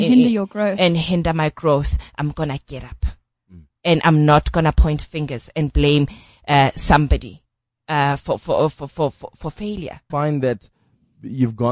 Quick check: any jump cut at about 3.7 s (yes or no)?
no